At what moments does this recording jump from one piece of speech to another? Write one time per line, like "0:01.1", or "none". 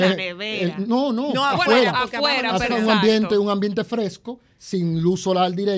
0:02.7